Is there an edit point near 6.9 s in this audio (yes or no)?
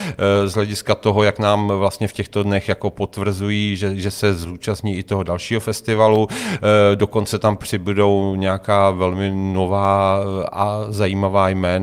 no